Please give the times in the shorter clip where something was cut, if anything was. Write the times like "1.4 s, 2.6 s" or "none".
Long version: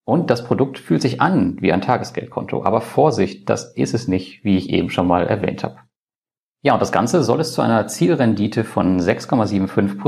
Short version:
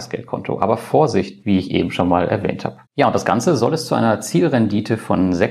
1.4 s, 2.9 s